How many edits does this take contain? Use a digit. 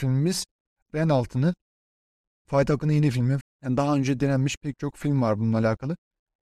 1